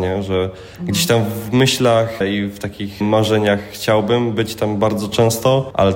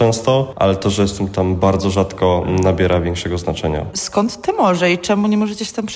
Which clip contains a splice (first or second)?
second